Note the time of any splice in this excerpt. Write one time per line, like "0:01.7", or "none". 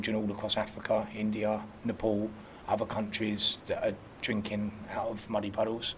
none